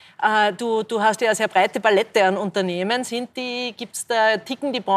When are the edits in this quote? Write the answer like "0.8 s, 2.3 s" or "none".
none